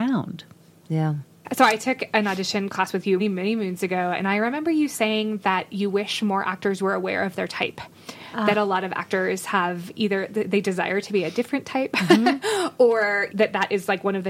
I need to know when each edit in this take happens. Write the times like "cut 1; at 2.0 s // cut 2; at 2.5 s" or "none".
cut 1; at 3.2 s // cut 2; at 13.3 s